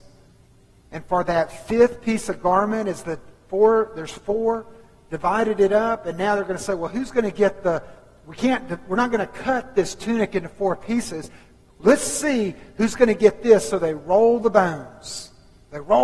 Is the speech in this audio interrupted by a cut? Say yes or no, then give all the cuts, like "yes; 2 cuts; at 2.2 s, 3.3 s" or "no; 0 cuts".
no; 0 cuts